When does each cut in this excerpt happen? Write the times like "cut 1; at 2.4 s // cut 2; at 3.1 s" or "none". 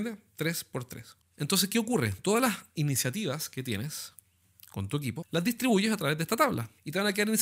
none